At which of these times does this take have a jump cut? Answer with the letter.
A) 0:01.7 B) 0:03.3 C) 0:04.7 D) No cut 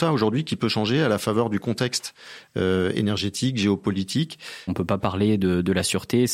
C